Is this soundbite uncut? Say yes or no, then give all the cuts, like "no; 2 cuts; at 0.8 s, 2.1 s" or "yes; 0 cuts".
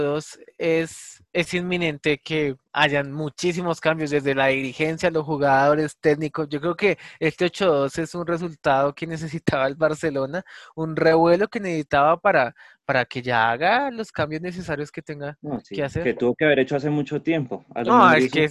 yes; 0 cuts